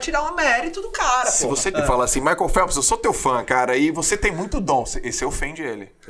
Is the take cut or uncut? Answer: cut